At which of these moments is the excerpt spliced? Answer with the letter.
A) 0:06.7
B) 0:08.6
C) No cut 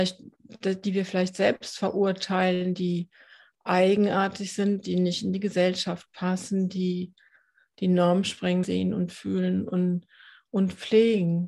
B